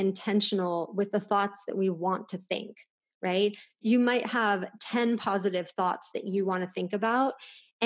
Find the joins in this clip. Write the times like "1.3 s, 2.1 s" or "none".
none